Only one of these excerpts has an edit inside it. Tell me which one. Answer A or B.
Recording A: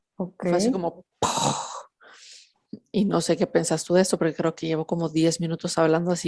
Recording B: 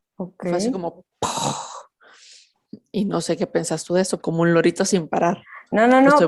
B